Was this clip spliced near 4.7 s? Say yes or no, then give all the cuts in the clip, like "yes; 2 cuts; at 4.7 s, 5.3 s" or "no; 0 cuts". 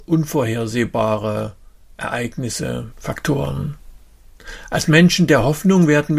no; 1 cut; at 2.9 s